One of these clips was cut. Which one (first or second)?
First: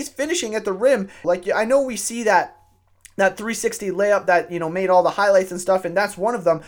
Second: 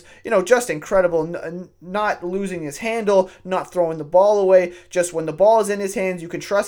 first